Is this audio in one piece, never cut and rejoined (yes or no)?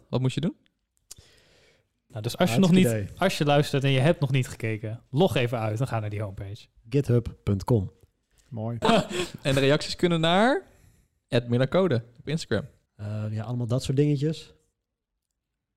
no